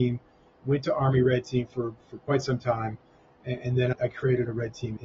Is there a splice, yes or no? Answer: no